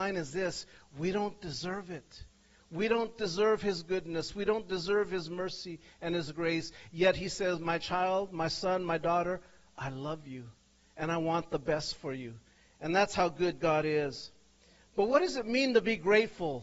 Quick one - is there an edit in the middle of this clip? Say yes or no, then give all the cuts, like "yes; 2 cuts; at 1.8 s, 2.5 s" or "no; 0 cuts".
no; 0 cuts